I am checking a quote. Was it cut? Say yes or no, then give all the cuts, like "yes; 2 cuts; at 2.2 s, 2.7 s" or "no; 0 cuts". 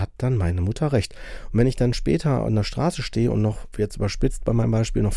yes; 1 cut; at 3.7 s